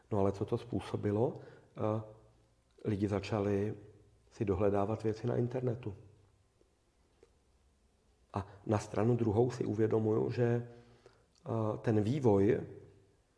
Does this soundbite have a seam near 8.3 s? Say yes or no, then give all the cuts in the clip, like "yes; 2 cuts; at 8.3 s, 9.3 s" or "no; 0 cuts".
yes; 1 cut; at 8.3 s